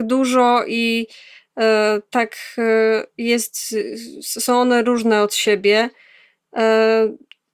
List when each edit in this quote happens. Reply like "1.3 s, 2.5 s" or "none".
none